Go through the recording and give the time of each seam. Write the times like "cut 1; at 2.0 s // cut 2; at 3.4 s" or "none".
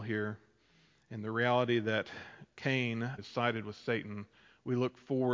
cut 1; at 3.2 s